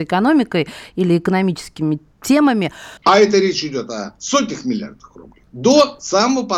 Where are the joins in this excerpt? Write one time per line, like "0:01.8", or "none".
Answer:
0:03.0
0:05.5

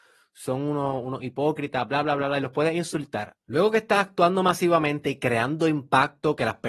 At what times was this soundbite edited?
0:03.4

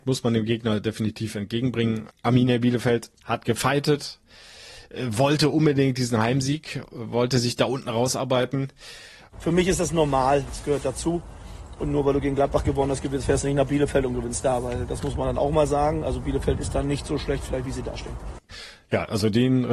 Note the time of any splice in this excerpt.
0:03.2
0:09.3

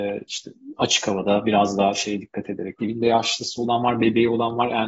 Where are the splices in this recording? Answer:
0:02.8

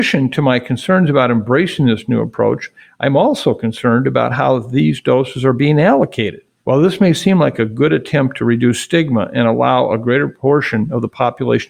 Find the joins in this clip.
0:06.6

